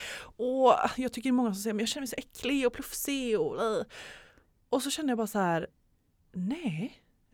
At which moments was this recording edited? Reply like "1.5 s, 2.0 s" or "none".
none